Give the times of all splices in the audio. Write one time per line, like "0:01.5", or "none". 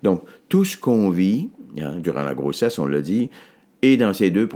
none